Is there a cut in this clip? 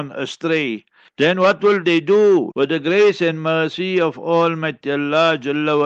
yes; 2 cuts; at 1.1 s, 2.5 s

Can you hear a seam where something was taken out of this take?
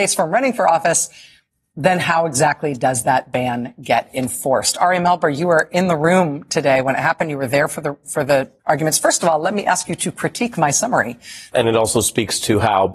yes; 2 cuts; at 8.6 s, 11.5 s

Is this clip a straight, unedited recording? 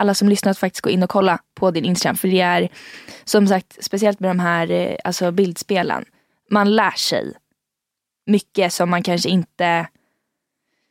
yes; 0 cuts

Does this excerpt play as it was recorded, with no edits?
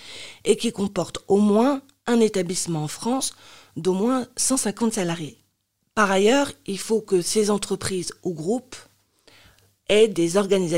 yes; 0 cuts

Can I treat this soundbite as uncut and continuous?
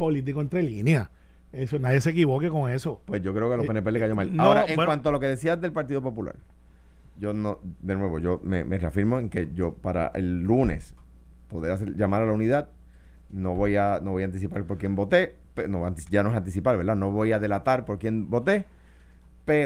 yes; 0 cuts

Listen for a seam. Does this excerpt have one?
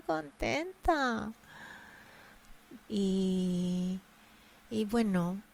yes; 1 cut; at 2.8 s

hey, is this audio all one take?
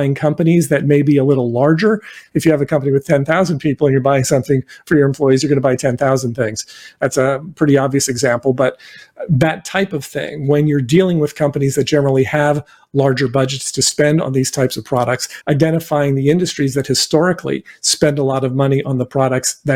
no; 2 cuts; at 2.3 s, 15.4 s

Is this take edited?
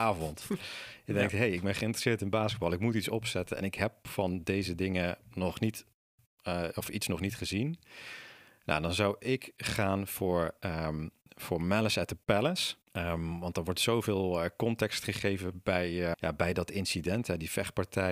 yes; 2 cuts; at 12.9 s, 16.1 s

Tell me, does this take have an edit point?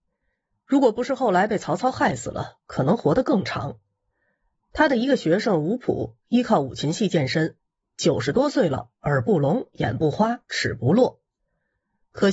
no; 0 cuts

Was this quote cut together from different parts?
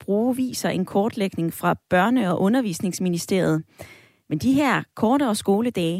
no; 0 cuts

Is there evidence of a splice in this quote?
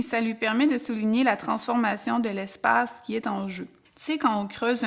yes; 1 cut; at 3.8 s

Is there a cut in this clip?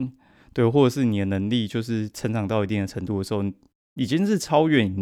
no; 0 cuts

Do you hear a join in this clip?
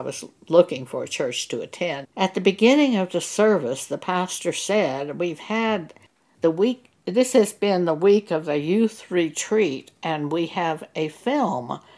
yes; 1 cut; at 2.0 s

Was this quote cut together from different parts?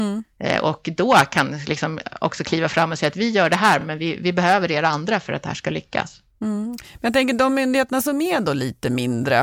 no; 0 cuts

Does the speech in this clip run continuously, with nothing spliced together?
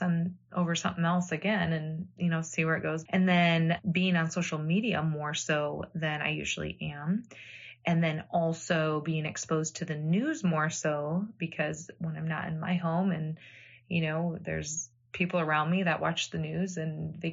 no; 1 cut; at 3.1 s

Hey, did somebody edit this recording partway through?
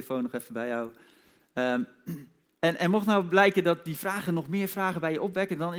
no; 0 cuts

